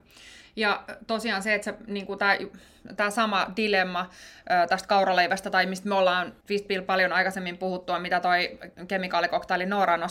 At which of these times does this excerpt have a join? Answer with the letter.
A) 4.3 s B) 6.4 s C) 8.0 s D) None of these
B